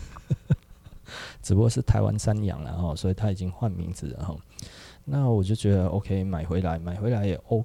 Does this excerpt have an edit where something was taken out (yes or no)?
no